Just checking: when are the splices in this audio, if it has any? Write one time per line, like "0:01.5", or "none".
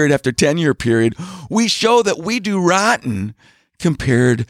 none